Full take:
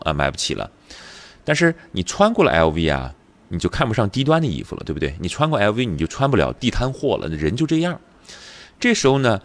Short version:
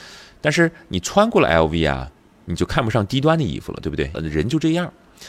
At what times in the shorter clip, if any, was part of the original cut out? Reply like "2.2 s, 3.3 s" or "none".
4.1 s